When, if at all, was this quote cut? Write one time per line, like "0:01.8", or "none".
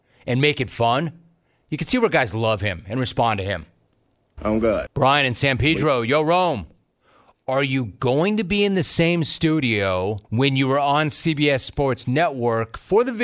0:04.9
0:10.2